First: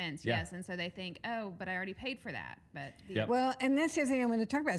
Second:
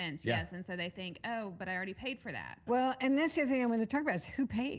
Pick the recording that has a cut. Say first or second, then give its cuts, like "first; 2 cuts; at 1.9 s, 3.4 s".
second; 1 cut; at 2.7 s